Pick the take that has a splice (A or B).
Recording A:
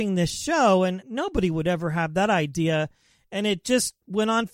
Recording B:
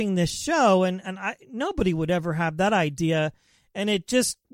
A